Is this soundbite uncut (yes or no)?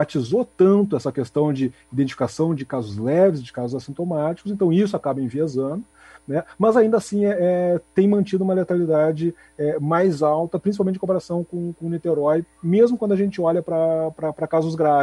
yes